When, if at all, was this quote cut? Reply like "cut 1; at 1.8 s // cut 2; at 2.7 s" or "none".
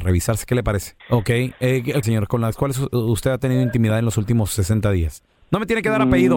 cut 1; at 1.0 s // cut 2; at 2.0 s